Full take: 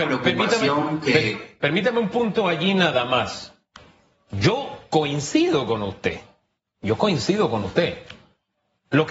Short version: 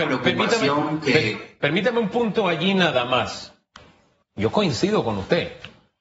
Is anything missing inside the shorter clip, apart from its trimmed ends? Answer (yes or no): yes